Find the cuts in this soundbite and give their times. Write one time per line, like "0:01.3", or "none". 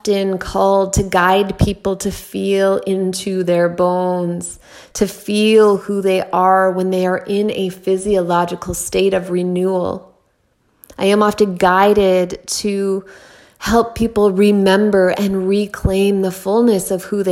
0:04.9